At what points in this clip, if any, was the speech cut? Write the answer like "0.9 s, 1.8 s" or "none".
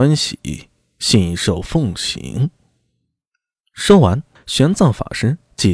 4.4 s